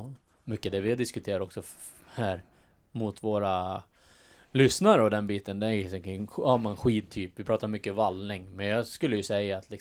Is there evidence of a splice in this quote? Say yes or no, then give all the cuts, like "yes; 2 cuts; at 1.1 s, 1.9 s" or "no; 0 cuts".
no; 0 cuts